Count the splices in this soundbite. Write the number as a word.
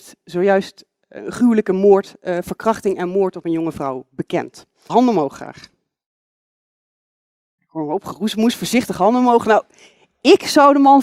one